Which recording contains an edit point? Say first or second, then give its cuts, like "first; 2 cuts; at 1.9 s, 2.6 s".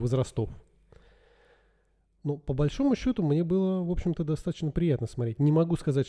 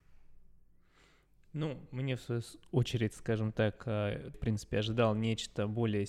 second; 1 cut; at 4.3 s